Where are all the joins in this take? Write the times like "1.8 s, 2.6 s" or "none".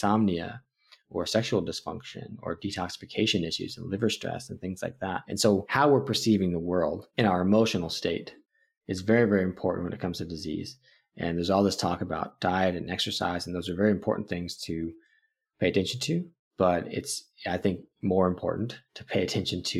none